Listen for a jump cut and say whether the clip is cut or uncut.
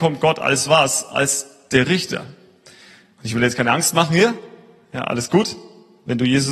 uncut